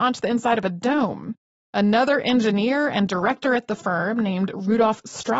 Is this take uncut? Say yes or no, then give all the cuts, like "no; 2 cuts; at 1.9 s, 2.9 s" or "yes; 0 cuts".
yes; 0 cuts